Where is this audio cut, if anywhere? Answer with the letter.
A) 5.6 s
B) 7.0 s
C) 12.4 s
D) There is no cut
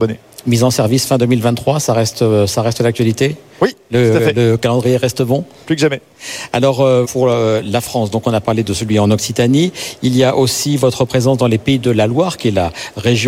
B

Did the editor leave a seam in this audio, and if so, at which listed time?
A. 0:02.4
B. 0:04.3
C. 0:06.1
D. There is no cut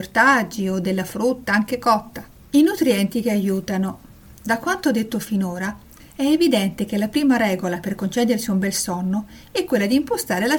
D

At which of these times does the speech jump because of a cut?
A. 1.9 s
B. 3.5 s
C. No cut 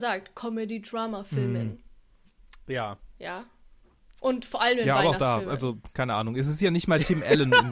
C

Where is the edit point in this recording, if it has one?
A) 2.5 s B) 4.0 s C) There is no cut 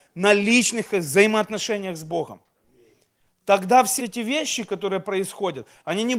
B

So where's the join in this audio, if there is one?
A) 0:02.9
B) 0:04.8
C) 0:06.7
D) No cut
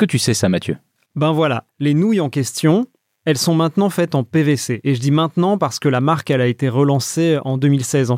D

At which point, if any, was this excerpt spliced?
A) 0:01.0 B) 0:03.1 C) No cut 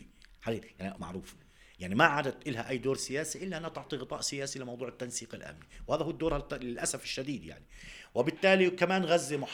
A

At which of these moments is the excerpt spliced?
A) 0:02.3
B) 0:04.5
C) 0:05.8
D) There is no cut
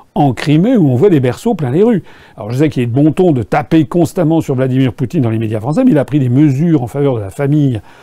A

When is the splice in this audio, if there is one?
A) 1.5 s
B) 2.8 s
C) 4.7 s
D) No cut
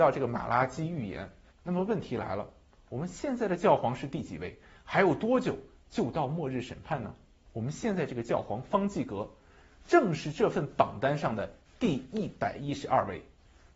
A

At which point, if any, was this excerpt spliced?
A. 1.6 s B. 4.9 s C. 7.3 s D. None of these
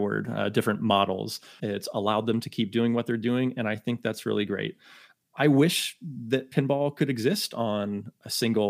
A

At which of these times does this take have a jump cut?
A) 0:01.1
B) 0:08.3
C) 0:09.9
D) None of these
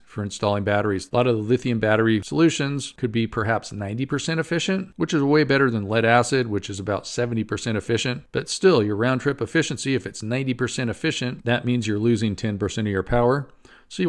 A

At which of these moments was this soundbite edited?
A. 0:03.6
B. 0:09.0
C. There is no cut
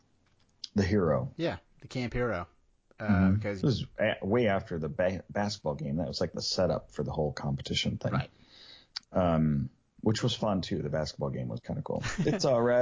A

